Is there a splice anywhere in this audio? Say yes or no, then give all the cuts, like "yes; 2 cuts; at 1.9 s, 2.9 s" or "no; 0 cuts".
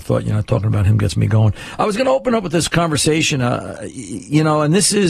no; 0 cuts